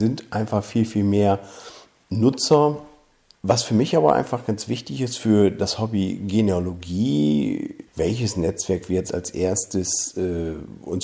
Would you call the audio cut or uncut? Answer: cut